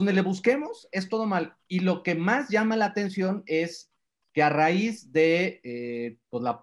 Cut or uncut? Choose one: uncut